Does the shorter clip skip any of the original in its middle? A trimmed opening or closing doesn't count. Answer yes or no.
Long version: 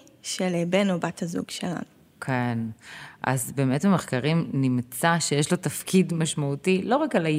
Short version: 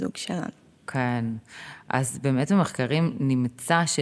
no